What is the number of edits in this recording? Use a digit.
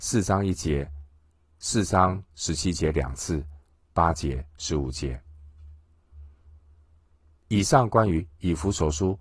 1